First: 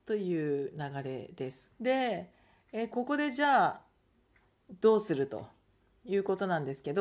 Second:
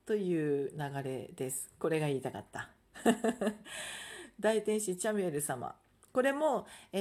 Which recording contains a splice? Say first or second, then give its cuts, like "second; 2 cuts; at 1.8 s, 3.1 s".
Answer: first; 2 cuts; at 1.7 s, 2.9 s